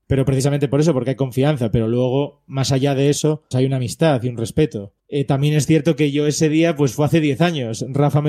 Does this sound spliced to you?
yes; 2 cuts; at 3.5 s, 5.0 s

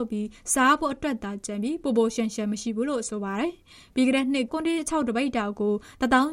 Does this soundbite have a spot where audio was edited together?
yes; 1 cut; at 4.5 s

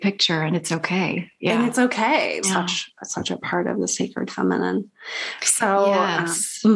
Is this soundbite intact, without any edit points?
no; 1 cut; at 2.4 s

